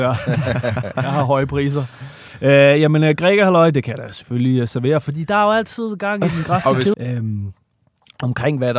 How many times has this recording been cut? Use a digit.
1